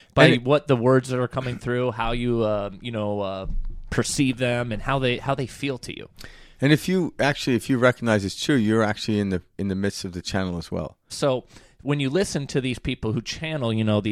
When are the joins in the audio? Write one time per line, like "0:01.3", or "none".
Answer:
0:11.1

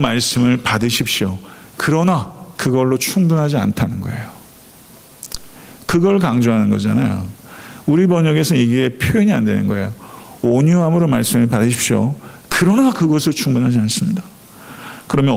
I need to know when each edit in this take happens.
0:02.6

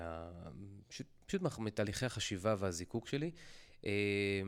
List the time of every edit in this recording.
none

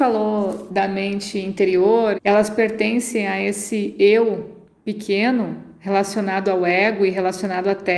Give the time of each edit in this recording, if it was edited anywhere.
0:02.1

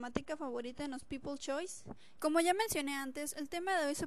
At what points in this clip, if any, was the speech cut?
0:02.2

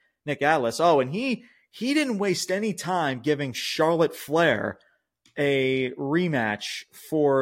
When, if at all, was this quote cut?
none

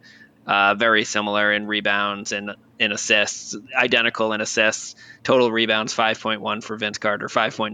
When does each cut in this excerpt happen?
none

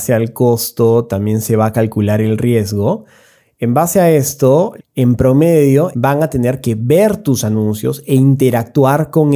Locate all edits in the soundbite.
0:04.8
0:05.9

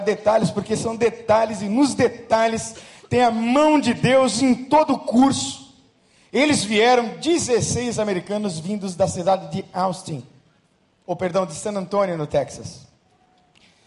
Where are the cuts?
none

